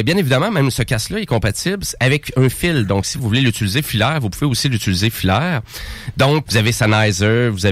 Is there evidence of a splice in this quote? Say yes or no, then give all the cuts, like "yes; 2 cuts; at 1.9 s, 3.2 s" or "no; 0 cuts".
yes; 2 cuts; at 3.2 s, 6.5 s